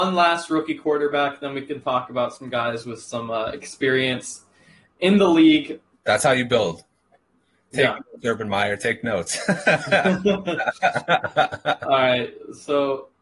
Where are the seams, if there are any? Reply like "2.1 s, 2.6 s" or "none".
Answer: 5.9 s